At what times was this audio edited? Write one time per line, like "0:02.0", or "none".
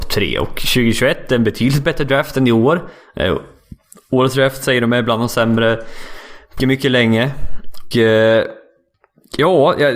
0:06.6
0:07.9